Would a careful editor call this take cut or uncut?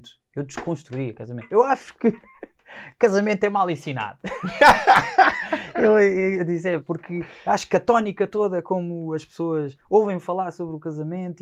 uncut